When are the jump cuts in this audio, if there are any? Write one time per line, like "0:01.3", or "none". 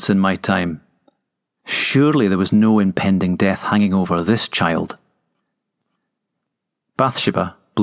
0:01.6